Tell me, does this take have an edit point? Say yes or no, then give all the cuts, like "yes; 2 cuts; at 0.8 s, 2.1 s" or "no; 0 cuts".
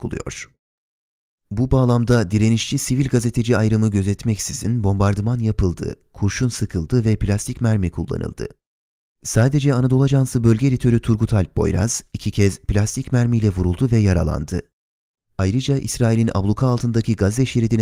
no; 0 cuts